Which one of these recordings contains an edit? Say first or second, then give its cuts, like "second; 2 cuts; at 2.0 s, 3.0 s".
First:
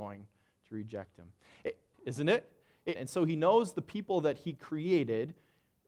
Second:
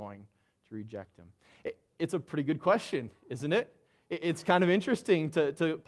first; 2 cuts; at 1.9 s, 3.0 s